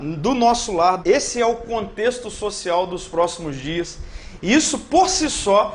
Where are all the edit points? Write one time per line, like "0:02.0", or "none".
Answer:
0:01.0
0:04.4